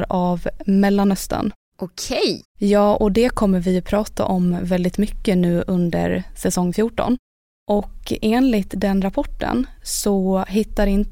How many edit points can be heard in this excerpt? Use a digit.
2